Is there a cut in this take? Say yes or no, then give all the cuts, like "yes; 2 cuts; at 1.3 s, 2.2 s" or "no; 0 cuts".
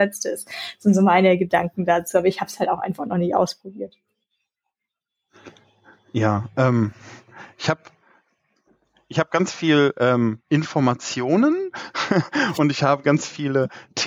no; 0 cuts